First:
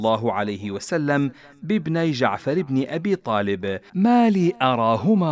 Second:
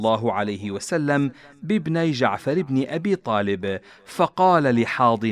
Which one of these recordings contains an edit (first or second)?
first